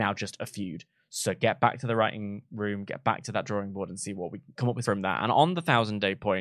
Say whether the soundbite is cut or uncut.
cut